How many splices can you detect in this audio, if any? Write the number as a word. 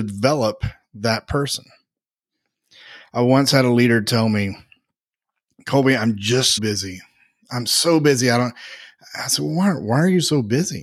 one